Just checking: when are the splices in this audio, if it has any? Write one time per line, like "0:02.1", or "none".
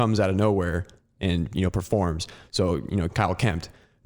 0:03.1